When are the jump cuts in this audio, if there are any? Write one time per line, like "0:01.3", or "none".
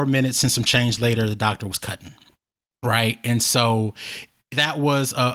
none